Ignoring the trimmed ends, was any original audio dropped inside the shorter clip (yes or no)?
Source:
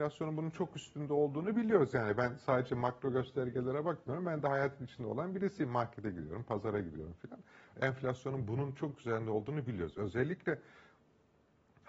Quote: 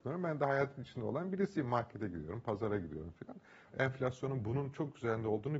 no